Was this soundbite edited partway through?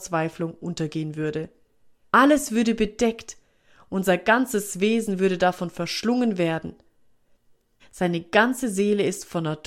yes; 2 cuts; at 2.0 s, 7.8 s

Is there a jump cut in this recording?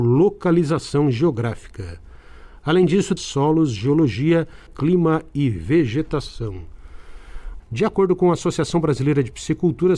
yes; 3 cuts; at 3.2 s, 4.7 s, 7.6 s

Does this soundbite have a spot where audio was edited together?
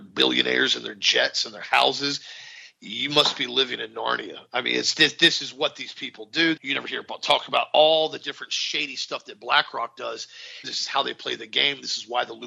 yes; 2 cuts; at 6.6 s, 10.6 s

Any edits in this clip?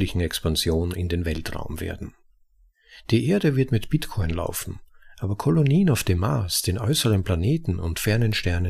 no; 0 cuts

